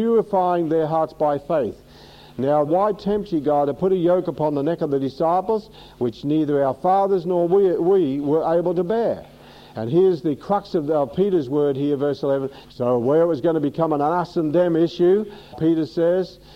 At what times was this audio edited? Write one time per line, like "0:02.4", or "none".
0:02.7
0:12.6
0:15.5